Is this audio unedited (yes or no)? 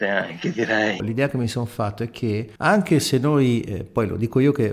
no